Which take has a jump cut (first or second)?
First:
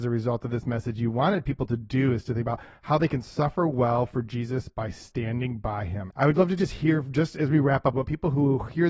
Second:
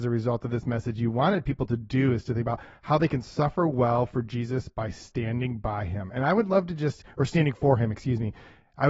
first